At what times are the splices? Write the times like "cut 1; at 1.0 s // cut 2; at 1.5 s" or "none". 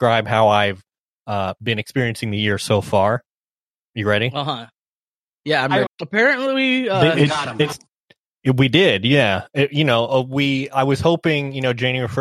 cut 1; at 5.9 s